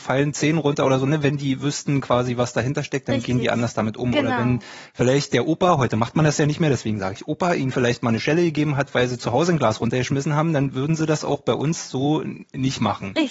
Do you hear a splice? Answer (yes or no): no